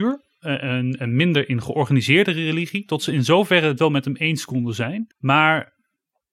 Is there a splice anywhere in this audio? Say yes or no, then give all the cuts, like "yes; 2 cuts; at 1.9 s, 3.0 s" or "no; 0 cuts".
yes; 1 cut; at 5.1 s